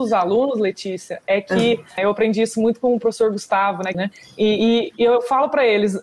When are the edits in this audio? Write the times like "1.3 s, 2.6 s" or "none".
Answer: 2.0 s, 3.9 s